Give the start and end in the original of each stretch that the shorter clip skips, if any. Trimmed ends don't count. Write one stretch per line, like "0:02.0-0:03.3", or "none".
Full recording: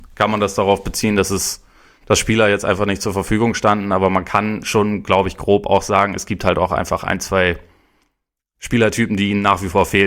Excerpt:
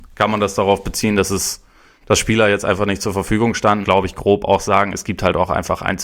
0:03.8-0:05.0